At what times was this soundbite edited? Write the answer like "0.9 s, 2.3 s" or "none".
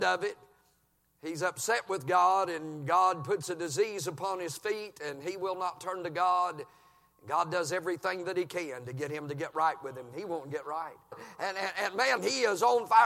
11.1 s, 12.2 s